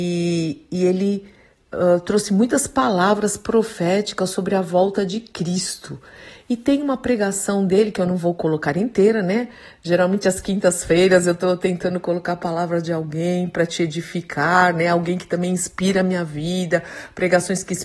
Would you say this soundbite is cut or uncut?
uncut